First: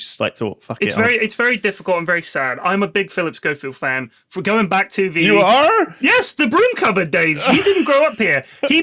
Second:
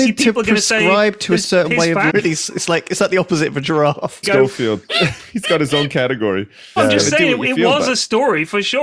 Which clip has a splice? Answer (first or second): second